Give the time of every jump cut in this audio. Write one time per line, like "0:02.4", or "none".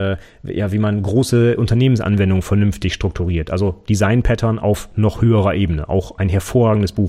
none